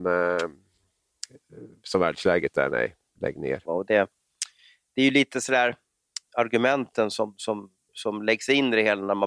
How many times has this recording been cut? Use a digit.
2